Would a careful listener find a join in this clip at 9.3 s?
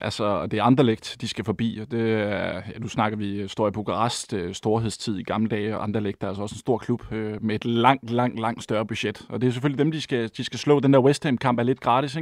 no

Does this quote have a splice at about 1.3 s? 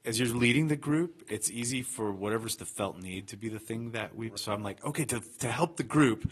no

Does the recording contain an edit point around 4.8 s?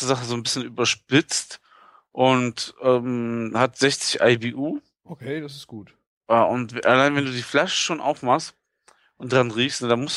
no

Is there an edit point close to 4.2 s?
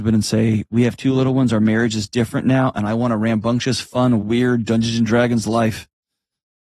yes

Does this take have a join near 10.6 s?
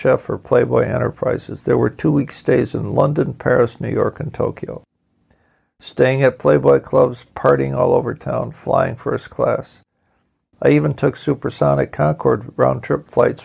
no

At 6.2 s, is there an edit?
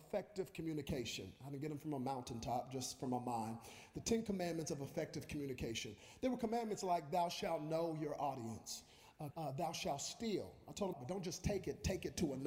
no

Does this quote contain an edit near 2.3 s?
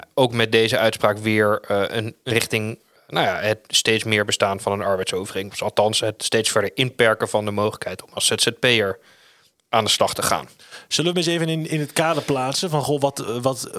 yes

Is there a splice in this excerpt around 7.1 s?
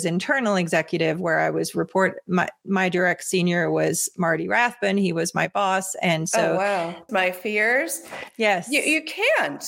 yes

